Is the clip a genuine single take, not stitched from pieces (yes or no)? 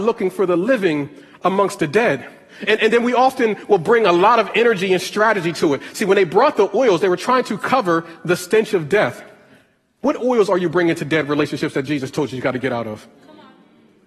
yes